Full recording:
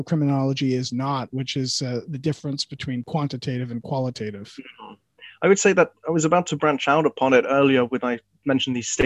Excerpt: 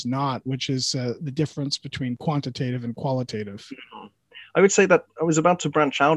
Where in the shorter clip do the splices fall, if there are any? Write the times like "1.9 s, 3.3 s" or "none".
none